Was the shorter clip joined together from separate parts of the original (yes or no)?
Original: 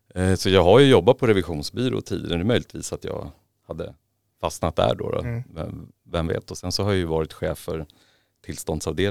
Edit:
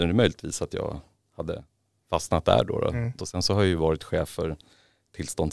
yes